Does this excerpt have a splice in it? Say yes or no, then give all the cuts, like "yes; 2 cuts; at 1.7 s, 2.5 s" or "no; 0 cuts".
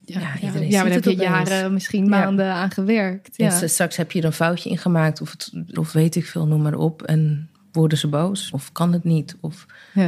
yes; 2 cuts; at 5.7 s, 8.5 s